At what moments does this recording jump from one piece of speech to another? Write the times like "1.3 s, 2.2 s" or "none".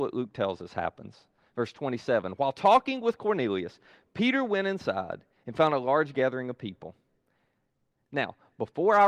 8.0 s